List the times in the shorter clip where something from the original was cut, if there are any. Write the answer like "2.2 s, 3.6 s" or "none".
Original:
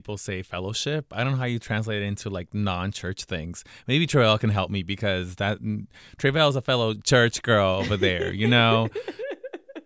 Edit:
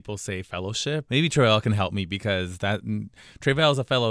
1.1 s